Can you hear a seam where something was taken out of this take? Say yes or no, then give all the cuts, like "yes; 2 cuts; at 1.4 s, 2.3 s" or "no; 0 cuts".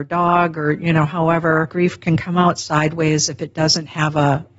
no; 0 cuts